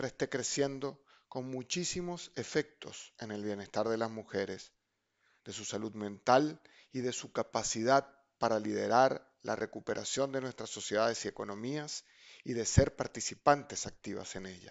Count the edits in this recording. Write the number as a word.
one